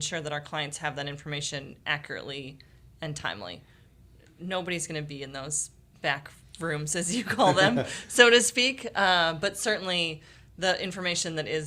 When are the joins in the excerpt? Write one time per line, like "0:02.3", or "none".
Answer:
none